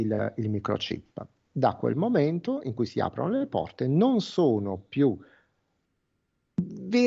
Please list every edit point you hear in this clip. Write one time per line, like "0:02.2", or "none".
none